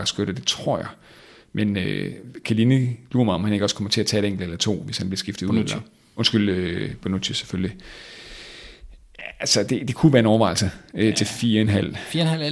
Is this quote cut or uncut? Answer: uncut